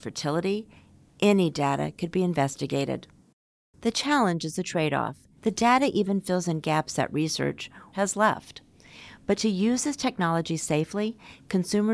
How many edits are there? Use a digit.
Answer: 2